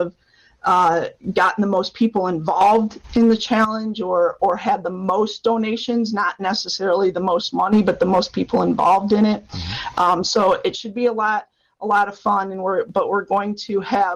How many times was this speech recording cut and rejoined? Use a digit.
0